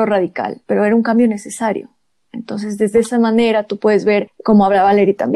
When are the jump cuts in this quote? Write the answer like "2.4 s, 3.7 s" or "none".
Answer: none